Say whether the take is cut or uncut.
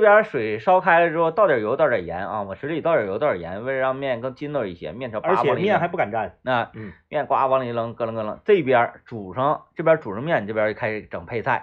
uncut